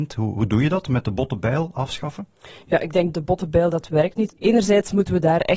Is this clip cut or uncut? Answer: cut